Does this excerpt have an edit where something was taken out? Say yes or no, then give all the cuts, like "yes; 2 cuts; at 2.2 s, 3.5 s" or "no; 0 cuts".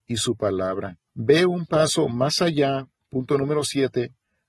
yes; 1 cut; at 1.1 s